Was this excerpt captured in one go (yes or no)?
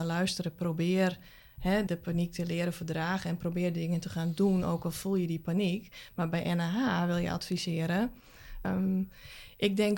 no